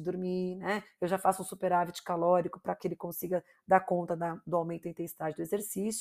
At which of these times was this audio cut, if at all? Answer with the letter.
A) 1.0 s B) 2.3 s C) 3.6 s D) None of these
A